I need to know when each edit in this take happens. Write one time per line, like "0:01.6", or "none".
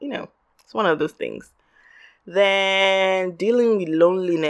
none